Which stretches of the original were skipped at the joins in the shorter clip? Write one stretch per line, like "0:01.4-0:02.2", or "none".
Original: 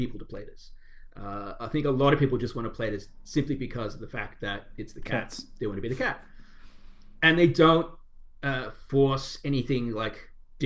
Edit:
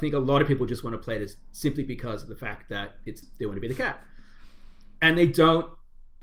0:04.9-0:05.4

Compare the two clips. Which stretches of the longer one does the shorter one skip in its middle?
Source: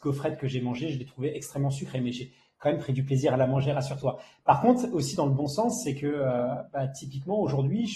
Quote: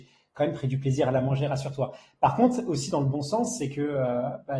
none

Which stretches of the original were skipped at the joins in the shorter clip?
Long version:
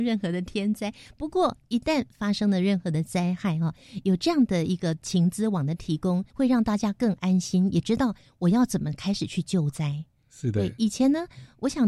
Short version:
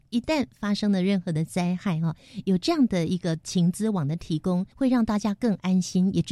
none

